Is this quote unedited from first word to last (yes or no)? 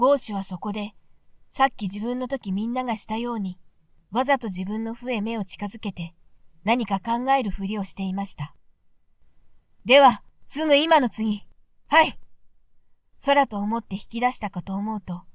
yes